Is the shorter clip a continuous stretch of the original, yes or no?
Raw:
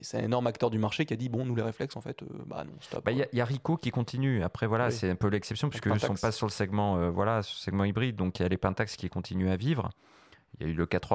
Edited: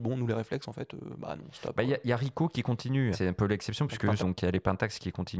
no